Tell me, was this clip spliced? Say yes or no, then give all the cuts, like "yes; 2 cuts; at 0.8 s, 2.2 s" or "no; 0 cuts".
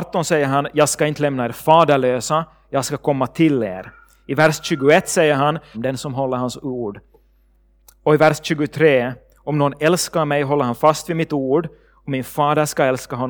yes; 1 cut; at 5.7 s